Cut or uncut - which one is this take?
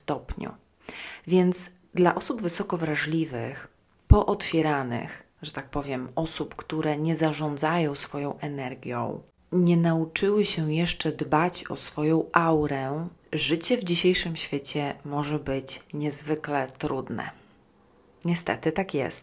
cut